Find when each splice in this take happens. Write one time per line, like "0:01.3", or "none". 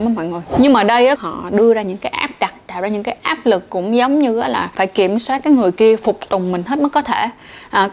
0:01.2

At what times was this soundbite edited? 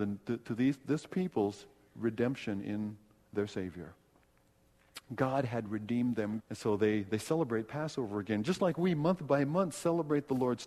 0:06.4

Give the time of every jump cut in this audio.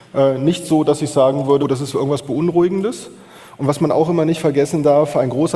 0:01.6

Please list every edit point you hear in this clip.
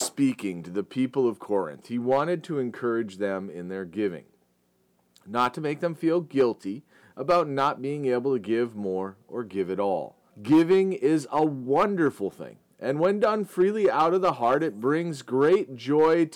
0:10.3

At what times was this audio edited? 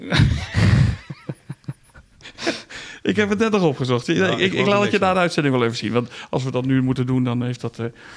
none

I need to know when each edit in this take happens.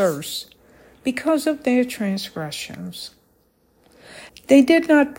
0:04.3

